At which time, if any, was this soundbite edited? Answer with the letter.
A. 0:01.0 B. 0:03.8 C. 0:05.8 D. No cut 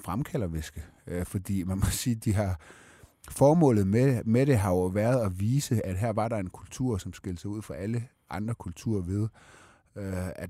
D